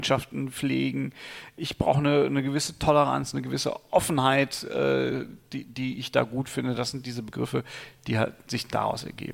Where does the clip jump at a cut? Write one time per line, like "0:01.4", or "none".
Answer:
none